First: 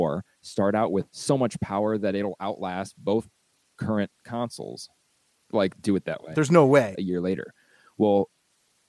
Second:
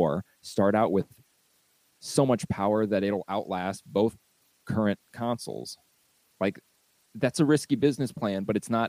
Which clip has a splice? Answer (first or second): first